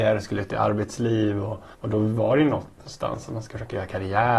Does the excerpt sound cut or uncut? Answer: cut